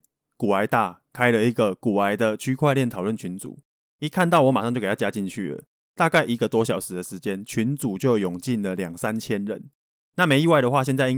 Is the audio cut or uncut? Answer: uncut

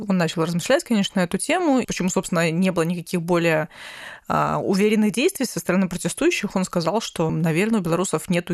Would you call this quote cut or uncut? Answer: cut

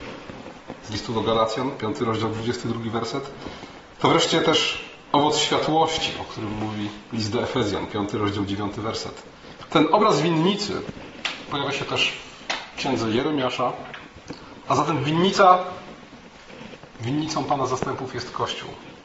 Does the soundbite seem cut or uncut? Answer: cut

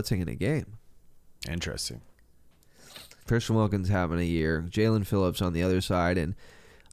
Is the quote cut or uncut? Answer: cut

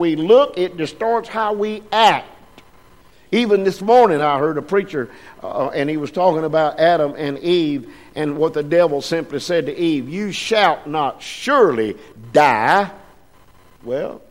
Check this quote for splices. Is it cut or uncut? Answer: uncut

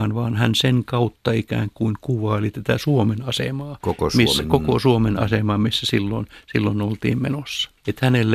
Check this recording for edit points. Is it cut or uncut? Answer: uncut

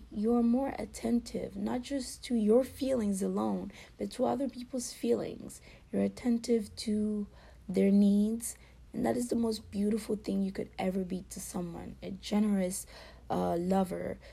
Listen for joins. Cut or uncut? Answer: cut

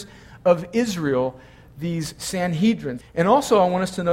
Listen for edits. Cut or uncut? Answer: cut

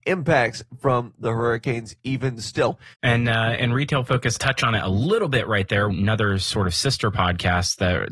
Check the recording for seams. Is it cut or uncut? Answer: cut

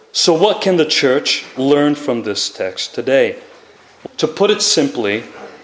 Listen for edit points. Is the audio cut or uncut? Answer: cut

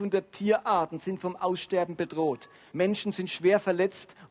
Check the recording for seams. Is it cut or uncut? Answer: cut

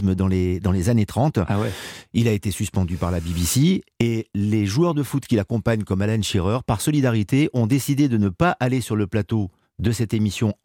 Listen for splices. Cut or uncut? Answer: uncut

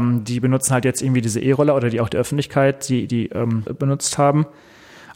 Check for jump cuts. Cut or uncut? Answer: cut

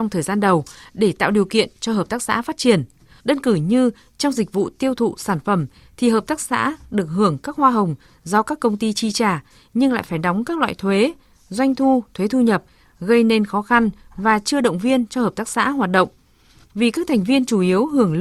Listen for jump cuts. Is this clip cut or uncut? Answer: cut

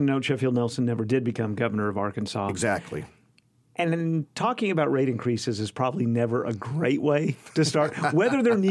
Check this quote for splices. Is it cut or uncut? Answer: uncut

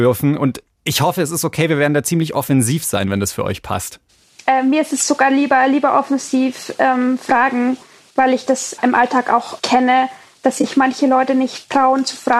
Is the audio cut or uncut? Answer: uncut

